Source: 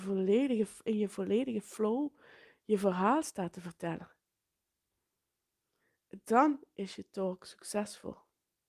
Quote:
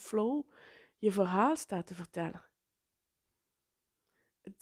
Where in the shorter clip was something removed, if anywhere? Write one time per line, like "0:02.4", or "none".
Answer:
none